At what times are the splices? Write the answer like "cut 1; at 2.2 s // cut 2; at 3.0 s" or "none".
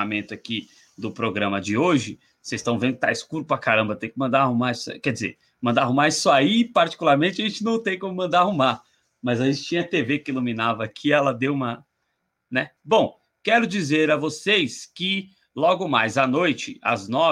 cut 1; at 12.8 s